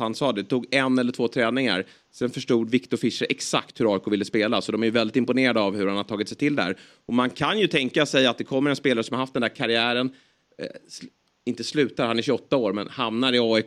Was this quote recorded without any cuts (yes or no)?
yes